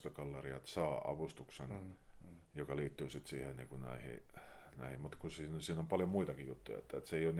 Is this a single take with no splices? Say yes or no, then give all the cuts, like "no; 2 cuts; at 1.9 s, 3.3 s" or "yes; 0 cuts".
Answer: yes; 0 cuts